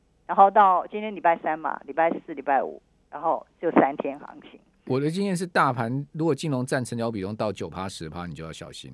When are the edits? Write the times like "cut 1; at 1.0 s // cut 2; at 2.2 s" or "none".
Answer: none